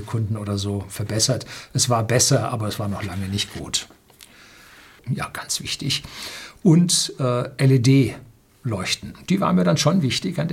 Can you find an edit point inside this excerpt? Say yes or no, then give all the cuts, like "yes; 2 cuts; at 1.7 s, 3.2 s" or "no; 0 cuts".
yes; 1 cut; at 5.0 s